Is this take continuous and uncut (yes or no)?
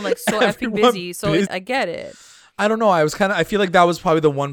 no